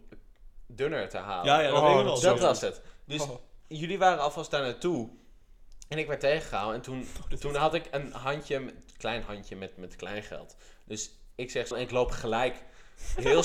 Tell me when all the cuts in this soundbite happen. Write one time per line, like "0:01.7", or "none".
0:11.7